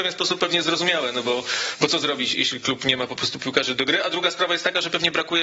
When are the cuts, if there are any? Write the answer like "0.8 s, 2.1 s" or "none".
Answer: 2.3 s